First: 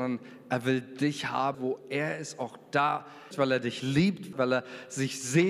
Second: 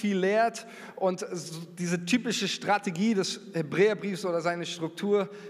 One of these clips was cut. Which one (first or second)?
first